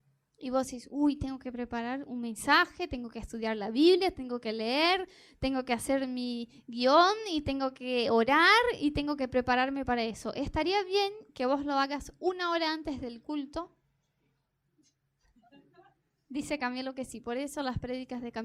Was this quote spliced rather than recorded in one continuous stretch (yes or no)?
no